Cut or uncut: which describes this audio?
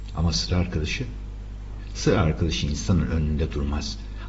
uncut